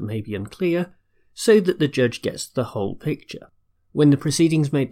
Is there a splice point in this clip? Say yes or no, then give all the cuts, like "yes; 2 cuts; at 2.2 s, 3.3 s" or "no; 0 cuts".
yes; 1 cut; at 3.7 s